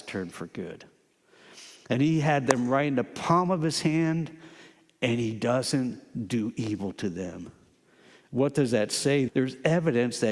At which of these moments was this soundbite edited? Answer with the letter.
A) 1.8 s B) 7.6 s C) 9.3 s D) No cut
C